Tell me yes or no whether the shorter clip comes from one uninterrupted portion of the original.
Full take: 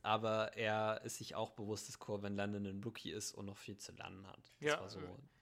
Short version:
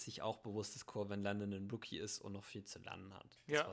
yes